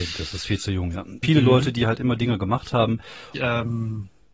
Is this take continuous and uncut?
no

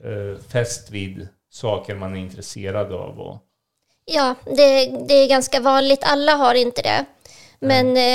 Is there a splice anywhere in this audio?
no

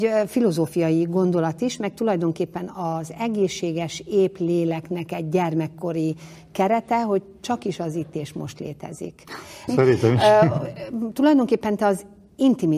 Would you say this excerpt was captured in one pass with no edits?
no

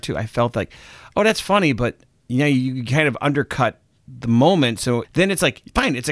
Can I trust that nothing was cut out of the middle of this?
no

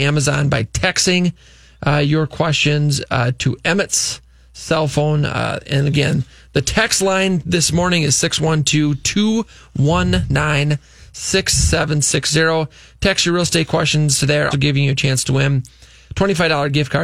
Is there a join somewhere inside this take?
yes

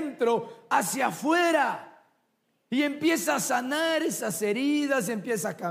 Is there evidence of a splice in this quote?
no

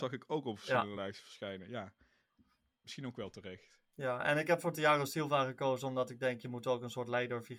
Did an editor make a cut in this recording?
no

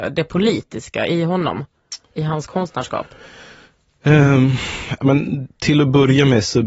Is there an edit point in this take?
no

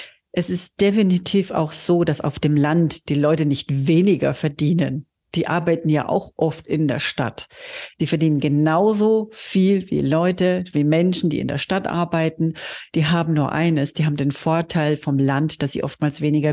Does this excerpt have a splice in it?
no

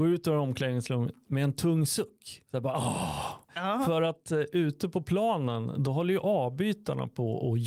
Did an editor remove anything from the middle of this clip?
no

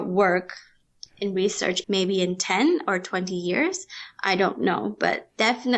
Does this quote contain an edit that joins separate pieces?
yes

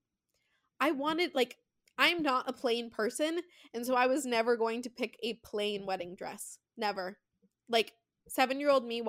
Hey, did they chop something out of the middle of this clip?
no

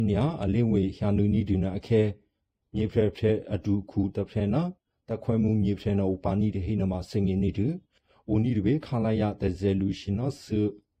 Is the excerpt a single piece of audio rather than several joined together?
yes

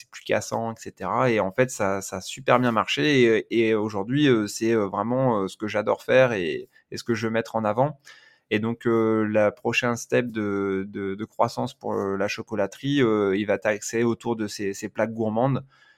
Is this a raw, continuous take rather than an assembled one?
yes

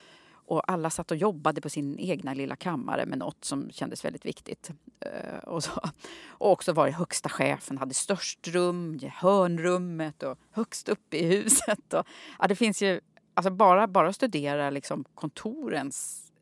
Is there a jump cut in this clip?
no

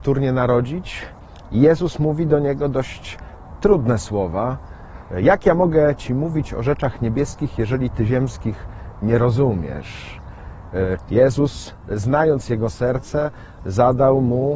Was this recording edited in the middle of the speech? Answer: yes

